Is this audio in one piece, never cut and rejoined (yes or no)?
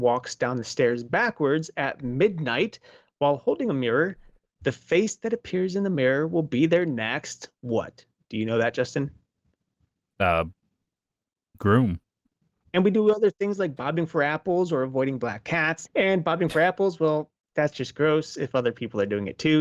no